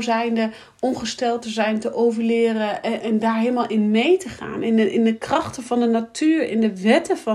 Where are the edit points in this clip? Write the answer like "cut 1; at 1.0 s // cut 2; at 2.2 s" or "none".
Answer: cut 1; at 3.0 s